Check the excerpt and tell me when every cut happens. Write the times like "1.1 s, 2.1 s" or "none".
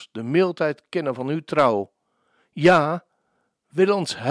none

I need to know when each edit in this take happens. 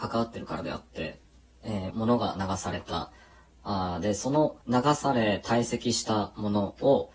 1.9 s, 4.6 s

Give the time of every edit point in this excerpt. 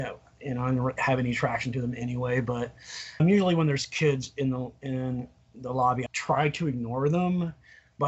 3.2 s, 6.1 s

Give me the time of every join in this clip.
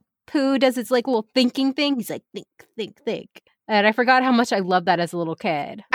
none

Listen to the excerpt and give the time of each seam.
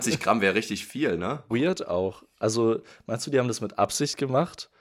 1.5 s

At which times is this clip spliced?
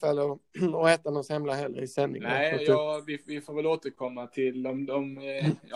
none

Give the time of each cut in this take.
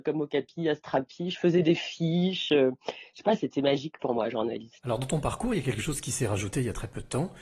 none

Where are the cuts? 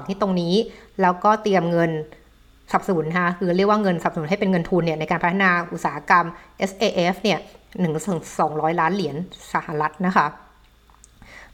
none

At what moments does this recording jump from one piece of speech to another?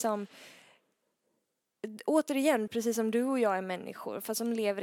2.7 s

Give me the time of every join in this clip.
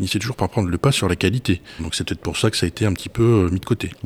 1.8 s

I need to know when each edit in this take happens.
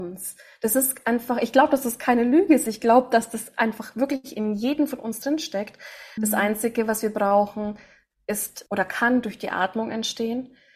6.2 s, 8.7 s

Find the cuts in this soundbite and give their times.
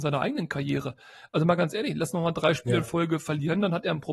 none

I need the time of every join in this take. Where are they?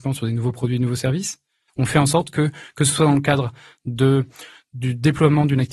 1.7 s

